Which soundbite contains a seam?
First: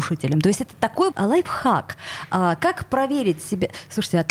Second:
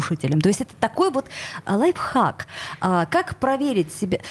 first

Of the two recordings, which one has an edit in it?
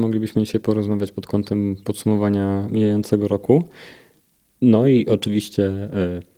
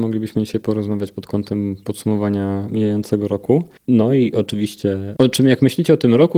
second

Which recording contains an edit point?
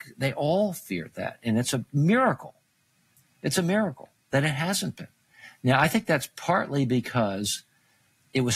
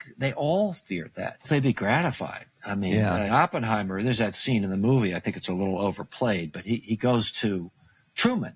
second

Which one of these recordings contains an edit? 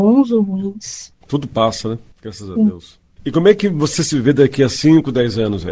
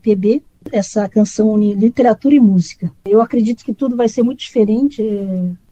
second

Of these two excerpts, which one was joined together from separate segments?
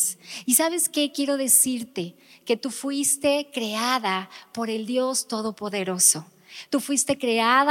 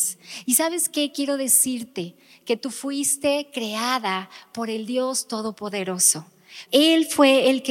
second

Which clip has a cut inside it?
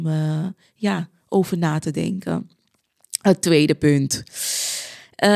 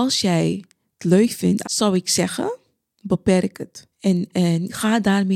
second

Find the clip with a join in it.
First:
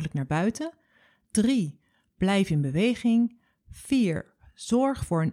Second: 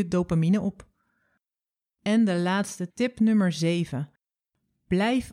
second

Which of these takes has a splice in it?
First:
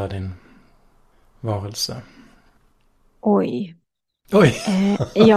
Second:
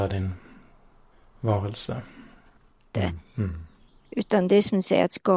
second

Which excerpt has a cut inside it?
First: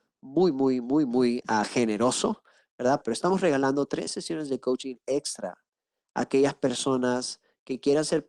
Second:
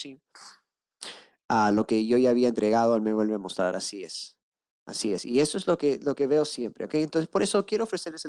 first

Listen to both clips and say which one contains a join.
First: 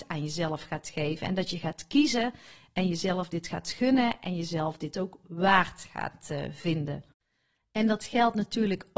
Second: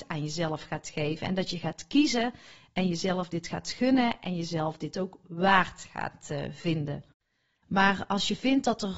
second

